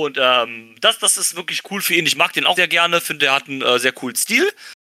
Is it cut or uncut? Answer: cut